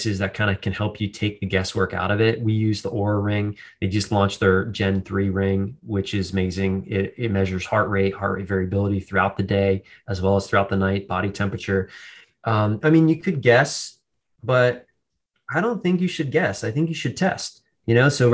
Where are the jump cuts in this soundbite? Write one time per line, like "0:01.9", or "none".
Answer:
0:12.8